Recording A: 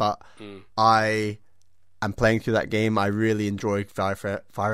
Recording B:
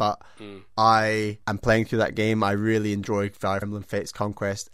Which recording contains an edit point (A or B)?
B